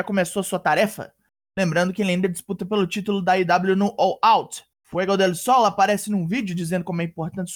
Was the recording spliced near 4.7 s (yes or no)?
yes